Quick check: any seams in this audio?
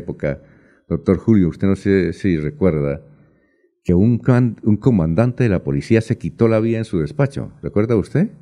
no; 0 cuts

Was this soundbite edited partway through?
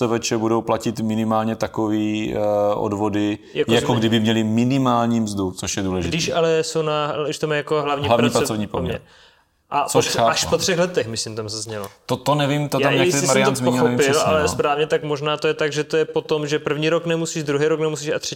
no; 0 cuts

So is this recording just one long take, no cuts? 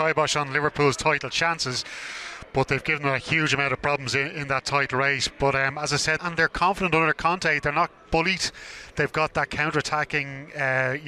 no; 1 cut; at 6.2 s

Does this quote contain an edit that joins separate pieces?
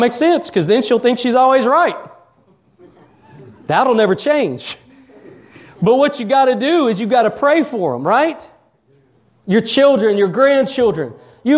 no; 0 cuts

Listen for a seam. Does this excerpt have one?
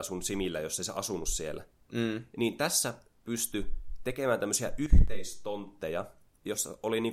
no; 0 cuts

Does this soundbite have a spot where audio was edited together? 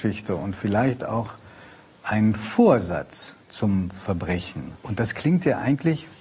yes; 1 cut; at 4.8 s

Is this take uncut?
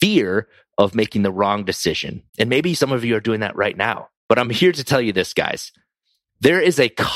no; 2 cuts; at 2.3 s, 4.2 s

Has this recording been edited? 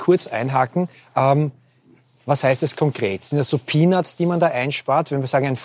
no; 0 cuts

